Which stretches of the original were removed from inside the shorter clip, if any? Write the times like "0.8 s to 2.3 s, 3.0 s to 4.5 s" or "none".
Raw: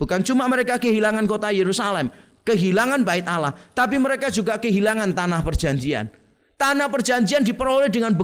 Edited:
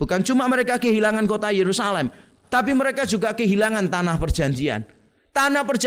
2.4 s to 3.7 s